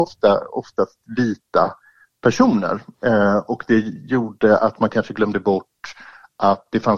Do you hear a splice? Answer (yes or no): no